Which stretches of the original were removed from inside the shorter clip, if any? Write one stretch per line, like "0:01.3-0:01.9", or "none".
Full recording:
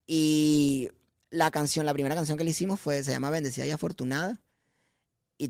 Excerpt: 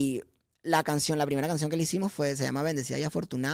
none